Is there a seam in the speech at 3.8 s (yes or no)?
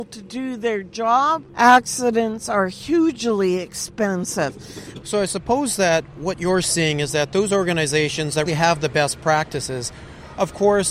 no